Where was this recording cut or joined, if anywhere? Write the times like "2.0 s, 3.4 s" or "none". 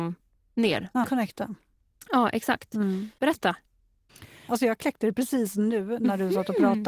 1.0 s, 3.2 s, 4.5 s